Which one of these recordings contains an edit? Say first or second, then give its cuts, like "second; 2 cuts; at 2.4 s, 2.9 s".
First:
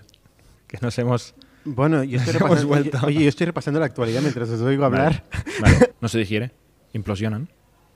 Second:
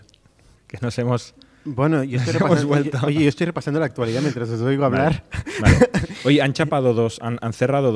first; 1 cut; at 5.9 s